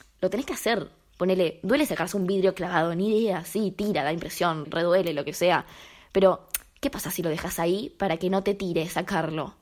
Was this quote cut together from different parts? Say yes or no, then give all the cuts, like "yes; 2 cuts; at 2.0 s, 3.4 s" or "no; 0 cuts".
yes; 1 cut; at 4.6 s